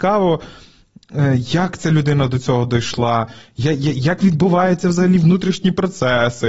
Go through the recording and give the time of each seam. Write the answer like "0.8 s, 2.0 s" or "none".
none